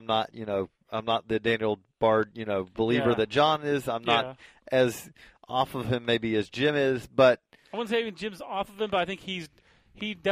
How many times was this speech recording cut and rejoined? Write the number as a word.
zero